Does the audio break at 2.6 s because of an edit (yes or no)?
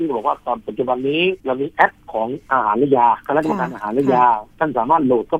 no